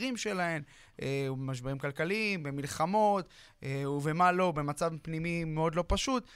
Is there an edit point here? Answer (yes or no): no